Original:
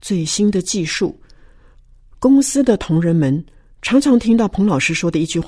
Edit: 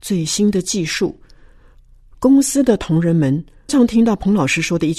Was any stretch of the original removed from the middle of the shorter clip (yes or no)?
yes